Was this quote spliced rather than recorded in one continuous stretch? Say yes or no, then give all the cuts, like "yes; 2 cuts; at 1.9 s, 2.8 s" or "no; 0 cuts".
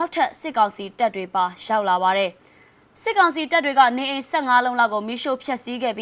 no; 0 cuts